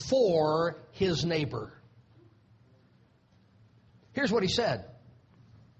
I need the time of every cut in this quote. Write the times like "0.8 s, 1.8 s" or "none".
none